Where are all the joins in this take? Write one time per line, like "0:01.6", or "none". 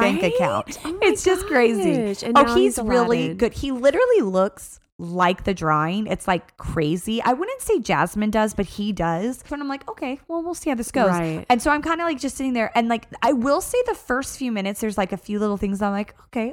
0:09.5